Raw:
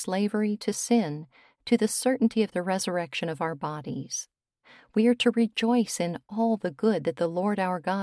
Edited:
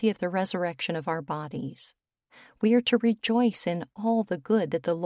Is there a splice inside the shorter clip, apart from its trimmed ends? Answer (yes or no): no